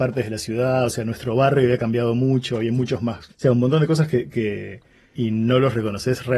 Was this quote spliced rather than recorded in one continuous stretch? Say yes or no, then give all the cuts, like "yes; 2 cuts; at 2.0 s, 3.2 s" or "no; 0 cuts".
yes; 2 cuts; at 3.3 s, 5.1 s